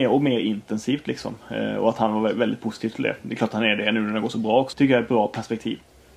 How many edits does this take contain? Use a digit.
1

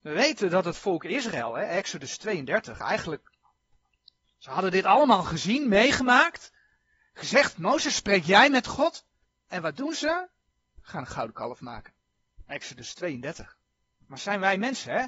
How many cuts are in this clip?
0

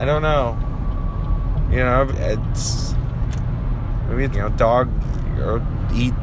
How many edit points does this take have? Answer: 2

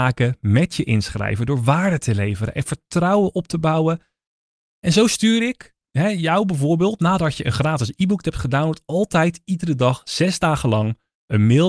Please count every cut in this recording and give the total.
0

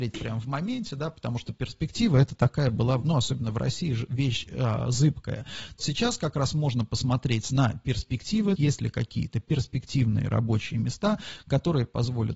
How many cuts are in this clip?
2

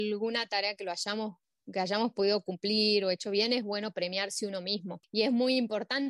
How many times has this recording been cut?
1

